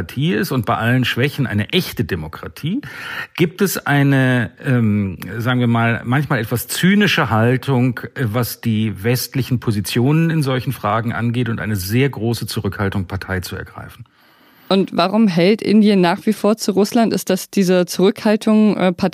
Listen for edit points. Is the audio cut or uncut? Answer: uncut